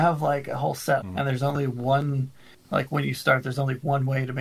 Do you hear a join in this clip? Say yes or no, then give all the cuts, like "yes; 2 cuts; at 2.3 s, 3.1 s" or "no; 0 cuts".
yes; 1 cut; at 1.0 s